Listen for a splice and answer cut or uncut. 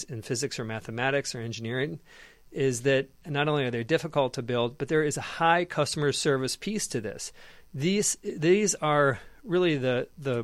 uncut